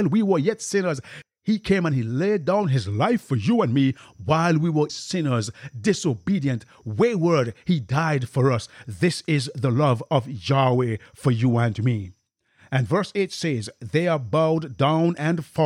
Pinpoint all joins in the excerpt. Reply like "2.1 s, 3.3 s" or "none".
4.9 s